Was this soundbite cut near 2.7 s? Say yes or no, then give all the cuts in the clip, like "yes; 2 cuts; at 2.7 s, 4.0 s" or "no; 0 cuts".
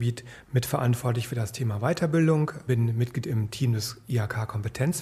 yes; 1 cut; at 2.7 s